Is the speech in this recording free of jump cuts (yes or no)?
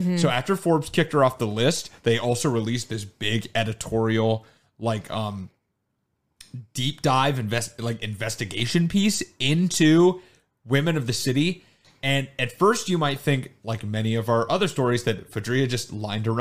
yes